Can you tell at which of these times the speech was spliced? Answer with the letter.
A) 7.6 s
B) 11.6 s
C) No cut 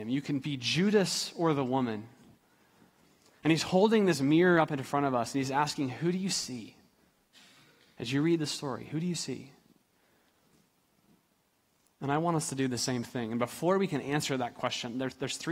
C